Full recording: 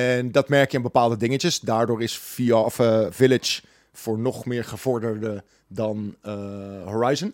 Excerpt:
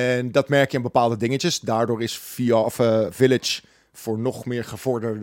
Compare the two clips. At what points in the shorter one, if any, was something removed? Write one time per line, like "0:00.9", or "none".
none